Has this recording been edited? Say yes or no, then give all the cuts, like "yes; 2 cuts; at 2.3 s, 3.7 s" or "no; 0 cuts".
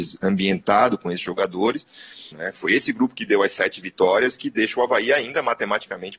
yes; 1 cut; at 2.3 s